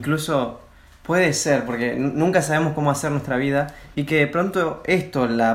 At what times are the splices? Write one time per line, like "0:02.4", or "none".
0:03.9